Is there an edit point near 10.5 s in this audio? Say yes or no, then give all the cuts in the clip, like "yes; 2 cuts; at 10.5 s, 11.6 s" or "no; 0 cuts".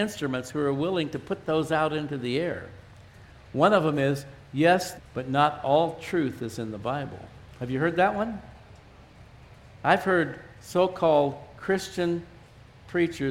no; 1 cut; at 5.0 s